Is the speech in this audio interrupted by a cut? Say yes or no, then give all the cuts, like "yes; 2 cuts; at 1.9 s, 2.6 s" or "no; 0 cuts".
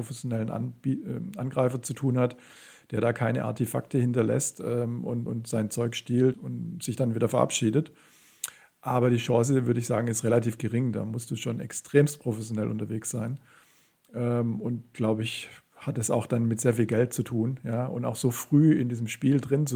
yes; 2 cuts; at 5.3 s, 6.3 s